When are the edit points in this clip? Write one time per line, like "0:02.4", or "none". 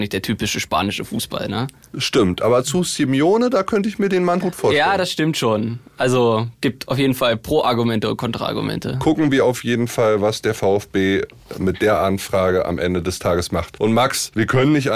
0:04.4